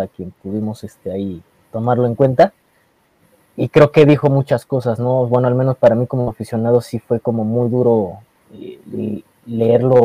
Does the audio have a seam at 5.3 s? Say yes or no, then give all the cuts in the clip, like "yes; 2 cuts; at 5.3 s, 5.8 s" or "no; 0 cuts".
no; 0 cuts